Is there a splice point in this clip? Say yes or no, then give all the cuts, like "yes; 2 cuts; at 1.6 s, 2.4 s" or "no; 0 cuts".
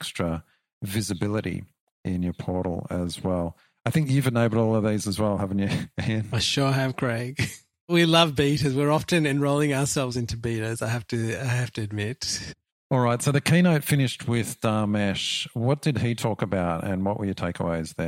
no; 0 cuts